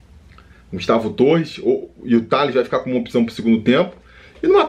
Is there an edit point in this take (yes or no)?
no